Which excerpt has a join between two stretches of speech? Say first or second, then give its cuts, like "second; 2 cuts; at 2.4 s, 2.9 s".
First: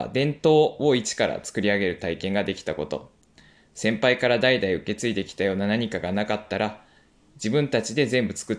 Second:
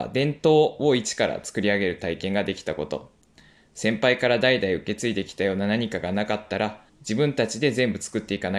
second; 1 cut; at 6.9 s